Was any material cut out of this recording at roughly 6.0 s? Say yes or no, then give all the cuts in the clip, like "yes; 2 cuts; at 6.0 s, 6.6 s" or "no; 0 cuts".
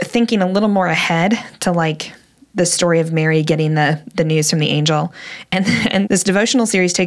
yes; 1 cut; at 6.0 s